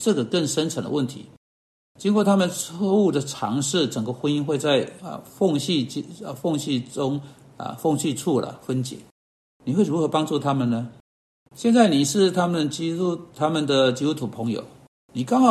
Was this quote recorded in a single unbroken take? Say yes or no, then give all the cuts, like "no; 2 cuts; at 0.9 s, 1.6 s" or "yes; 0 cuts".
no; 3 cuts; at 5.0 s, 9.5 s, 11.4 s